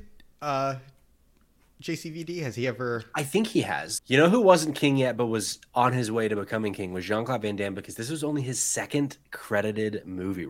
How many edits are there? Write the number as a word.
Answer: one